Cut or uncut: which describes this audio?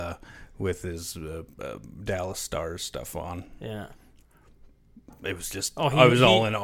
uncut